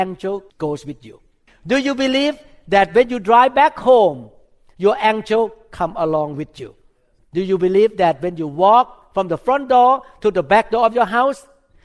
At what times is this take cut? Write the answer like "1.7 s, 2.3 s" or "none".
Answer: none

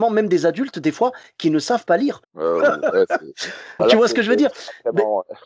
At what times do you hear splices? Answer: 2.2 s, 3.8 s

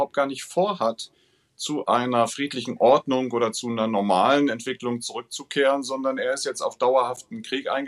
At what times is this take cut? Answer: none

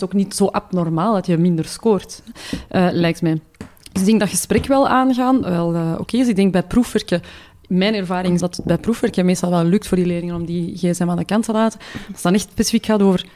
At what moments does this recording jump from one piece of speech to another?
5.4 s, 8.4 s

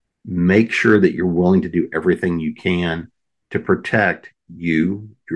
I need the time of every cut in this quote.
none

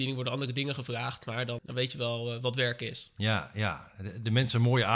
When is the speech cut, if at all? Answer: 1.6 s

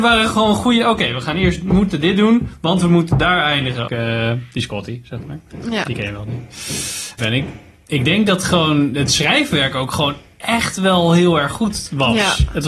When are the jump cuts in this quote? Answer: 3.9 s, 7.2 s

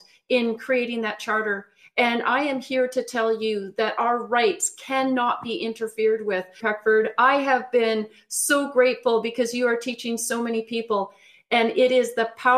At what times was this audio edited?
6.6 s

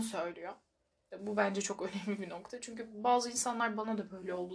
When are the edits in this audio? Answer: 1.1 s

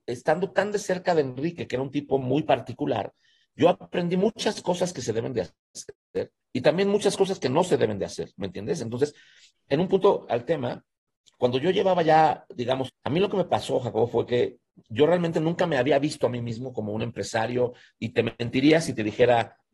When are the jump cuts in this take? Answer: 6.4 s, 10.3 s, 12.9 s

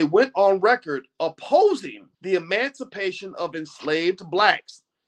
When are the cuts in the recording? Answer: 2.1 s

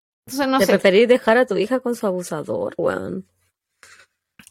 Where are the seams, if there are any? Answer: 2.8 s

